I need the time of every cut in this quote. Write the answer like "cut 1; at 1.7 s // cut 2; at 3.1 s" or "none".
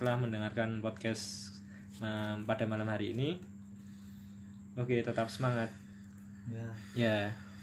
none